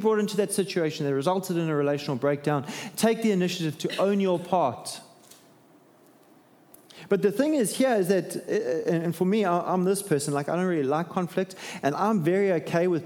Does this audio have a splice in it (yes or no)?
no